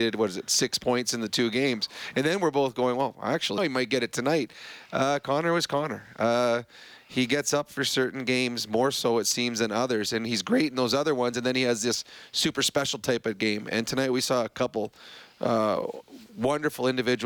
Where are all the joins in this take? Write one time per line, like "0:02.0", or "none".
0:03.6